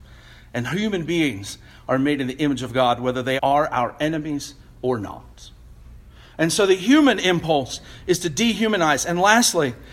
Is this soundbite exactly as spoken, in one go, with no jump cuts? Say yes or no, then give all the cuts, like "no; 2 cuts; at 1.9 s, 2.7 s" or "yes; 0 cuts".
no; 1 cut; at 3.4 s